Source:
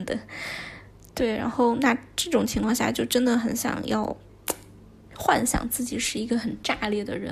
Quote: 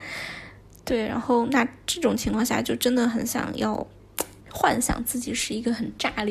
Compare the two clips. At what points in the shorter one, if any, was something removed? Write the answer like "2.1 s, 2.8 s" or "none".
4.4 s